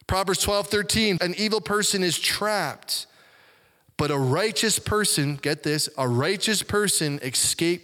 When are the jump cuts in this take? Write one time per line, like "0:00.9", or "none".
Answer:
0:01.2